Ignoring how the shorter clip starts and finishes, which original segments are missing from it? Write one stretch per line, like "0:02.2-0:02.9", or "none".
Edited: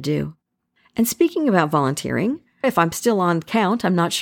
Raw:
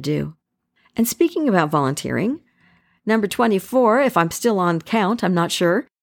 0:02.6-0:04.0